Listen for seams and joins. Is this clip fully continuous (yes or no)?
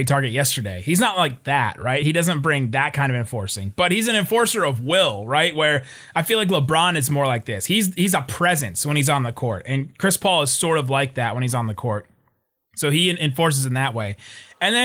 yes